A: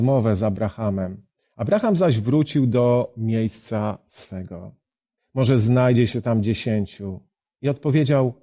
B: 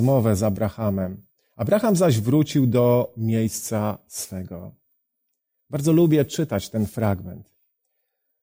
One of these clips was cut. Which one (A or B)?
A